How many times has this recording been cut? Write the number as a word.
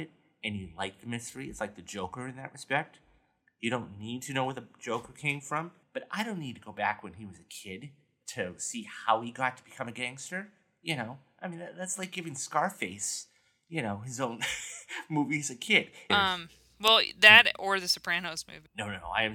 two